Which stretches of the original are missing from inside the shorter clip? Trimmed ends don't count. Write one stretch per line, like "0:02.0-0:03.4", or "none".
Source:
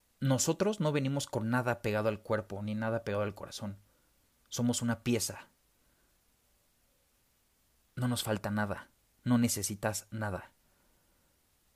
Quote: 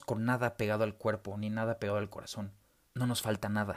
0:04.1-0:07.9